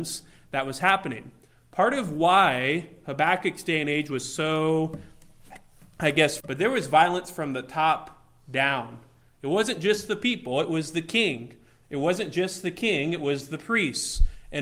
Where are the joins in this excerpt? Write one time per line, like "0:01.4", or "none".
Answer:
0:06.4